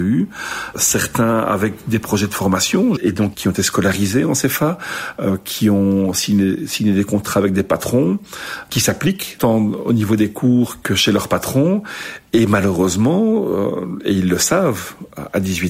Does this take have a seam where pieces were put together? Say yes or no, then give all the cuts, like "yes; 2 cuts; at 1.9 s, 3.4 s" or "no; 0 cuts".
yes; 1 cut; at 3.0 s